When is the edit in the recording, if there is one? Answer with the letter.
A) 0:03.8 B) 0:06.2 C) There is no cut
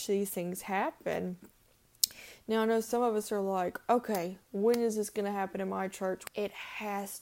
B